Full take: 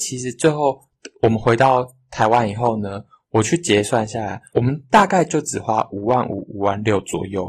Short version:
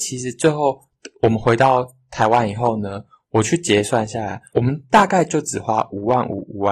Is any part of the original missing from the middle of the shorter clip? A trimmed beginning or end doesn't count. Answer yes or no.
no